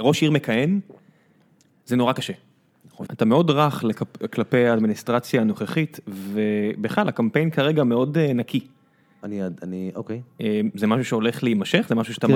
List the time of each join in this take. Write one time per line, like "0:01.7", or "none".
0:03.1